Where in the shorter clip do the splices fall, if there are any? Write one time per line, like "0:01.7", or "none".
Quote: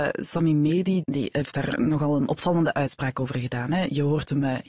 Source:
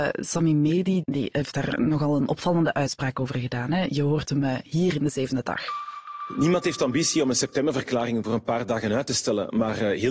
none